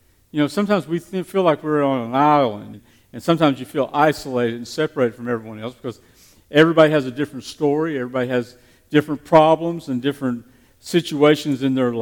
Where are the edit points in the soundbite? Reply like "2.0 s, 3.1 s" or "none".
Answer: 2.7 s